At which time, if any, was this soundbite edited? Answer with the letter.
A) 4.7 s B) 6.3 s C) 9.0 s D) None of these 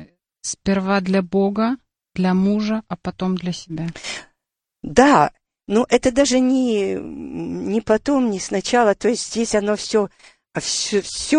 D